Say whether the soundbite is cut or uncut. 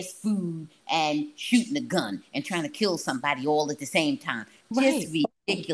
uncut